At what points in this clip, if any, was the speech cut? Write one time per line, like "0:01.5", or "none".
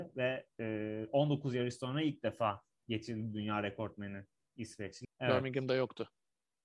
0:05.0